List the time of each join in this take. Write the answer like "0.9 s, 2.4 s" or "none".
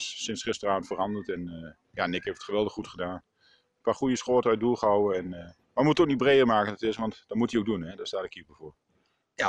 5.6 s